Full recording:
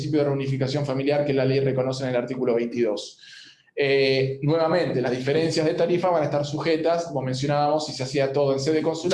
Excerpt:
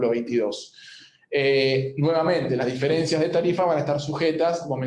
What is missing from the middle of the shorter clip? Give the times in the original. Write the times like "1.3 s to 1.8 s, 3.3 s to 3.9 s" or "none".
none